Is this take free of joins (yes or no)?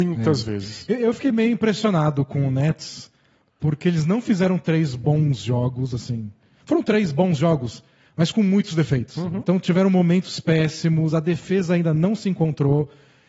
yes